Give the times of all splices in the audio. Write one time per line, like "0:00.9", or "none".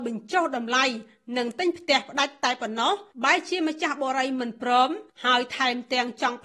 0:03.1